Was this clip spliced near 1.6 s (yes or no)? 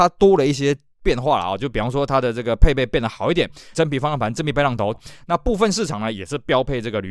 no